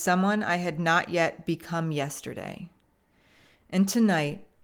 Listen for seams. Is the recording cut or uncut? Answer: uncut